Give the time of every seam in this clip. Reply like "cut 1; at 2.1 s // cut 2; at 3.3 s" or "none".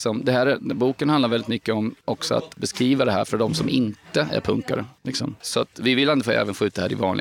none